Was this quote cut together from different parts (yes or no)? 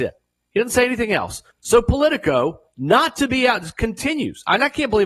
yes